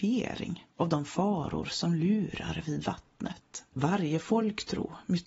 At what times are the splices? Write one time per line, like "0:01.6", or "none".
0:03.7